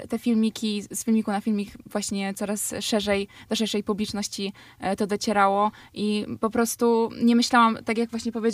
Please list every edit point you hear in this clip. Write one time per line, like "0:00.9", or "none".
none